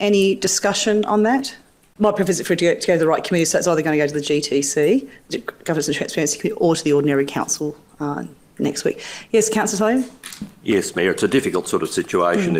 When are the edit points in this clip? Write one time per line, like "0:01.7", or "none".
0:01.9